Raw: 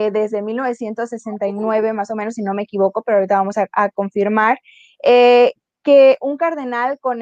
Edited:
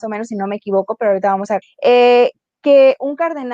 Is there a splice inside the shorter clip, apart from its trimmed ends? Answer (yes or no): yes